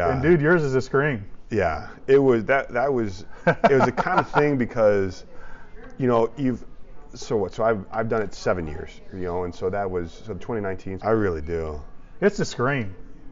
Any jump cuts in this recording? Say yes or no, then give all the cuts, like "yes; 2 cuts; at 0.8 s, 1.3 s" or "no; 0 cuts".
yes; 1 cut; at 11.0 s